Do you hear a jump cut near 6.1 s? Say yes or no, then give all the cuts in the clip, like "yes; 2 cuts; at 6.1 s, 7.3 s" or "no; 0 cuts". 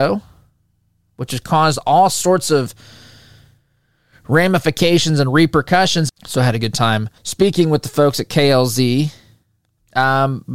yes; 2 cuts; at 6.1 s, 7.2 s